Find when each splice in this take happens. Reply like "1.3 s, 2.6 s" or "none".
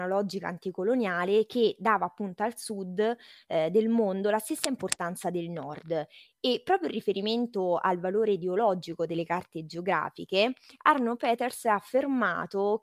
none